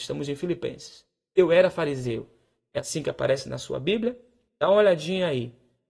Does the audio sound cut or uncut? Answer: uncut